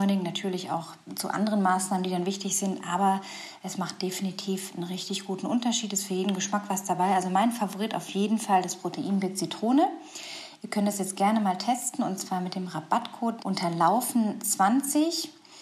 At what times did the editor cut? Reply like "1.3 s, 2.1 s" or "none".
13.4 s